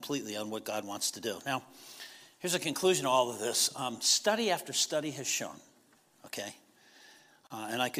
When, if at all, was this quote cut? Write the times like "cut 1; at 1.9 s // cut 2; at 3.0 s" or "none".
none